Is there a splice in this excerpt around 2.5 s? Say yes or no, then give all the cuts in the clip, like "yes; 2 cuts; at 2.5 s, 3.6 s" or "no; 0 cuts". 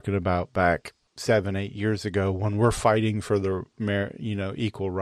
no; 0 cuts